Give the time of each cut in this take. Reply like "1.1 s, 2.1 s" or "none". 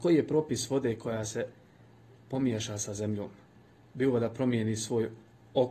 none